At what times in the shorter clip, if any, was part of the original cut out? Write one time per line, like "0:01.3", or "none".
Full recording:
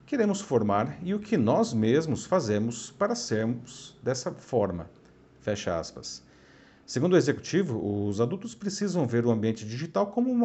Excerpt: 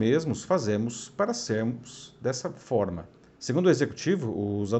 0:03.3